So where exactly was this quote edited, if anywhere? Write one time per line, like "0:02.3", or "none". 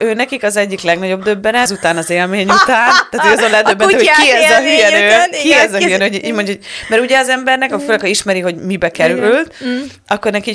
0:01.7

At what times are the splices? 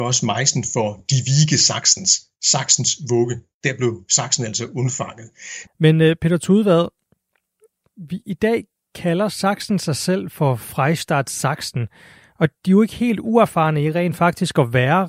0:05.7
0:12.6

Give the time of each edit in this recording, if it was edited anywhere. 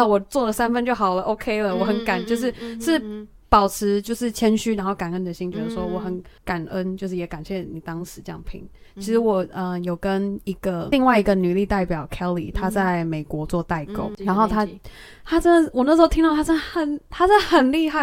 0:06.4

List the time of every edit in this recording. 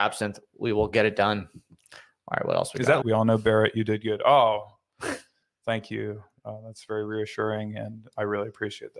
0:03.0

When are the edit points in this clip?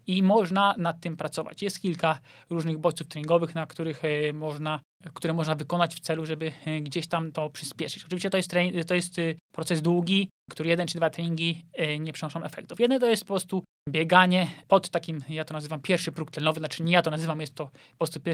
0:07.3
0:12.8

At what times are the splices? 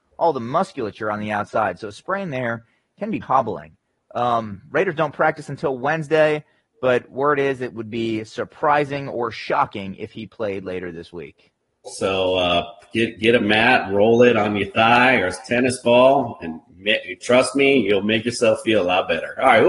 0:03.2
0:11.9

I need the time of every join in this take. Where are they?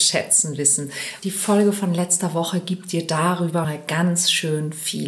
0:01.2
0:03.6

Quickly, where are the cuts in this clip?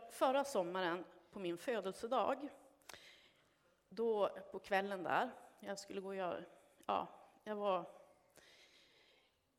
none

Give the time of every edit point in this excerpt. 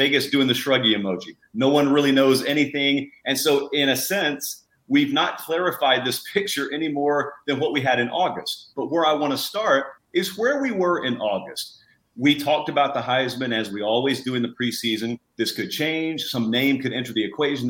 0:10.0
0:15.3

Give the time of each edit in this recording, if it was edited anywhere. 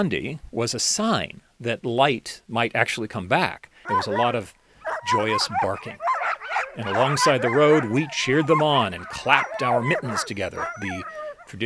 0:03.9

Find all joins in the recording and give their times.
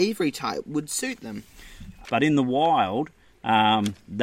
0:02.0

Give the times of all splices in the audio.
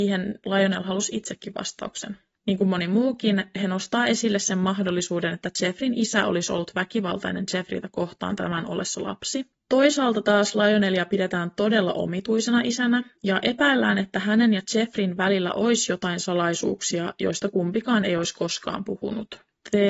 0:02.4
0:09.5

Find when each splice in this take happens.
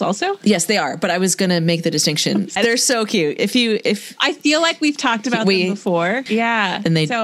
0:02.6
0:06.3

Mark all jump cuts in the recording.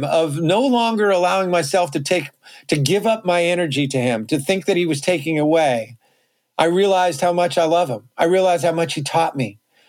none

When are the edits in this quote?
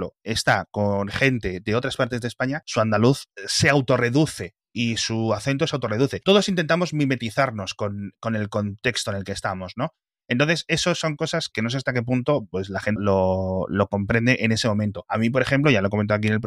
0:13.0

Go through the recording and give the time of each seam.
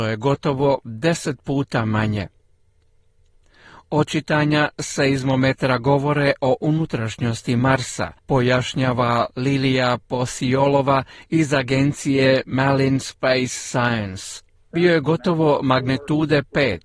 0:08.2
0:14.7

